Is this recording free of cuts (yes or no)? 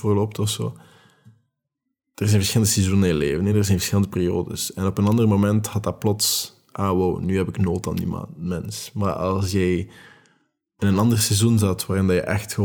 yes